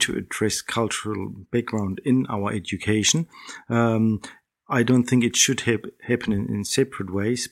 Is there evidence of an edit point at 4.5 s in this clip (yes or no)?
no